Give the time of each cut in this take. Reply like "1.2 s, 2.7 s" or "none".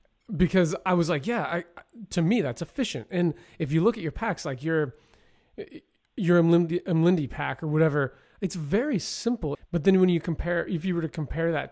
9.5 s